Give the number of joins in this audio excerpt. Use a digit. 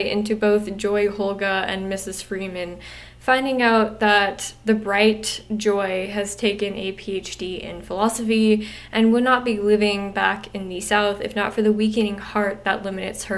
0